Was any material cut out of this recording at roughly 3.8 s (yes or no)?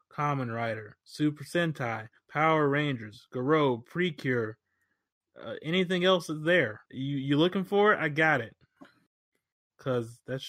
no